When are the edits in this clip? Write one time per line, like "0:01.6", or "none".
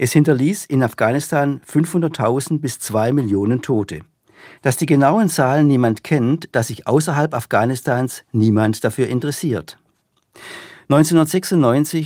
0:06.5

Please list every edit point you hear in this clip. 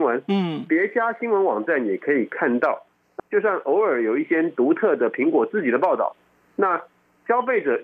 0:03.2

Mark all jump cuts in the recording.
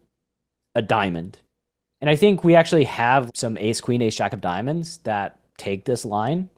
0:02.0
0:03.3

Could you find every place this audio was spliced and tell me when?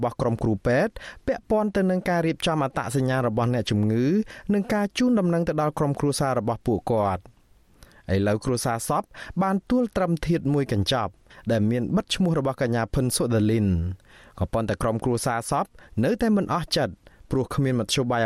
0:09.6

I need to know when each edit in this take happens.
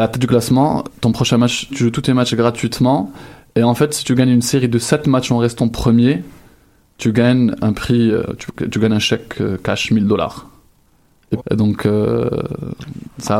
0:01.7
0:11.4

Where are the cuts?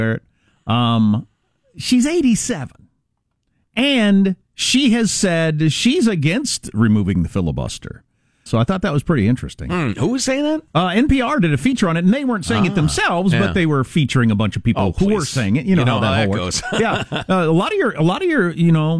0:08.5

